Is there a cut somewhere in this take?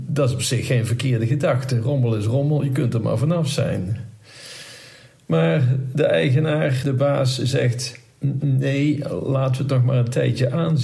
yes; 1 cut; at 6.8 s

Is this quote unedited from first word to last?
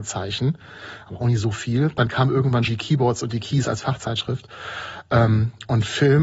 no; 1 cut; at 2.7 s

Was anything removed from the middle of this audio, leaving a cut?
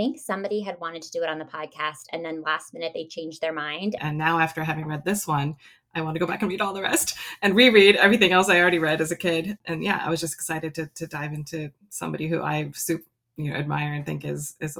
yes; 1 cut; at 4.0 s

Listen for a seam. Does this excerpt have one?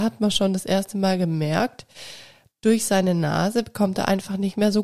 no; 0 cuts

